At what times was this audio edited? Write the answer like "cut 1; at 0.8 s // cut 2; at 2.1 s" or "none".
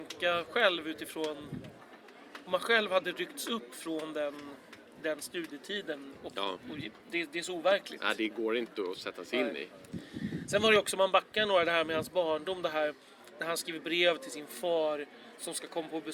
cut 1; at 7.0 s

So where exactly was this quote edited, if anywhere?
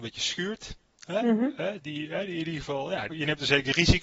cut 1; at 1.8 s // cut 2; at 3.1 s

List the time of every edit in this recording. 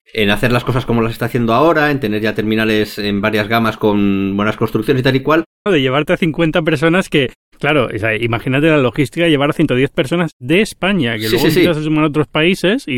cut 1; at 5.7 s

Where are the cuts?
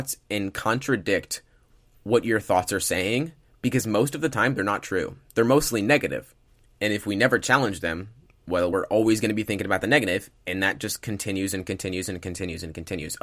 none

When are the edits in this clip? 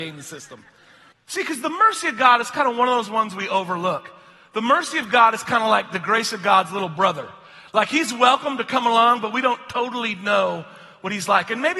cut 1; at 1.1 s

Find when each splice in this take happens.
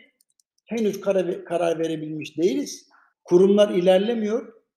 cut 1; at 3.1 s

